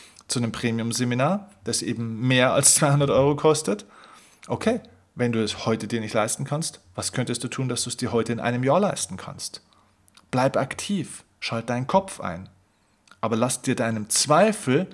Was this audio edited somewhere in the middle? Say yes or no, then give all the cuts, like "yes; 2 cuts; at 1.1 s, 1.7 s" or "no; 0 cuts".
no; 0 cuts